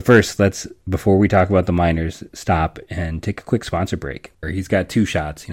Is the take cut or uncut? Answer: cut